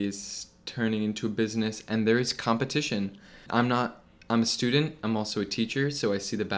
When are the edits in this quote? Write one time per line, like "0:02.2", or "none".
0:03.5